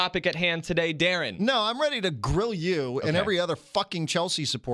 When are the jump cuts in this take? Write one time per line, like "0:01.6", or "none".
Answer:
none